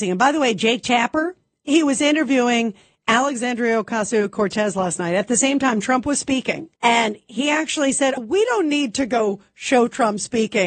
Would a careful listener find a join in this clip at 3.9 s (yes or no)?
no